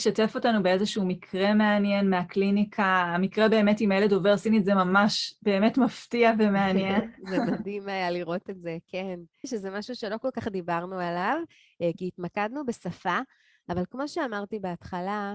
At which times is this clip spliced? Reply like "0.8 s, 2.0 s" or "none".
9.4 s